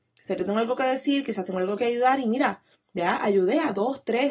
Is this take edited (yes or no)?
no